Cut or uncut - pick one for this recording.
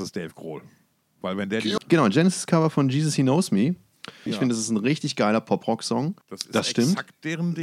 cut